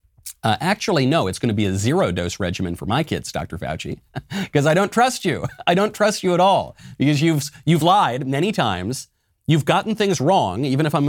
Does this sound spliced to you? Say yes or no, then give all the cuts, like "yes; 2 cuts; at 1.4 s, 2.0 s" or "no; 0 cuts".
no; 0 cuts